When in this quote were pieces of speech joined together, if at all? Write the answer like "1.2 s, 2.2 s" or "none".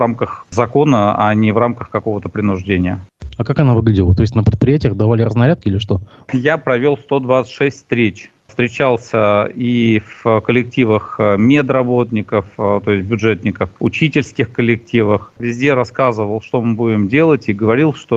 none